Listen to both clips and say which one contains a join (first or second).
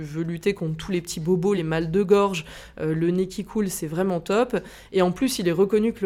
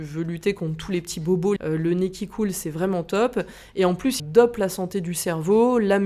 second